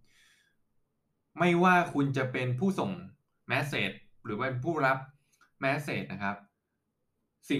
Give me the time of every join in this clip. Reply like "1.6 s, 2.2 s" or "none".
none